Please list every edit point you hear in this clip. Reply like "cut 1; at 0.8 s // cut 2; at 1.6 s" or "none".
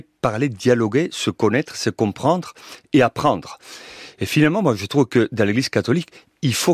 none